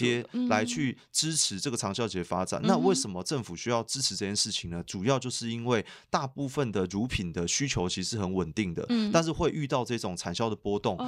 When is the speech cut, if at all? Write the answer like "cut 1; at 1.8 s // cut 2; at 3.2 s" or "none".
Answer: none